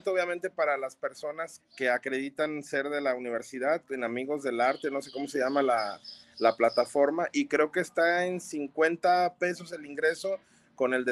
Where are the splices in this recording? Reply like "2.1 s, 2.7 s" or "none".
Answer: 1.6 s